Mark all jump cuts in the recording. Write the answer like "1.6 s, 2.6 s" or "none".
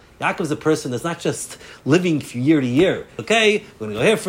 3.2 s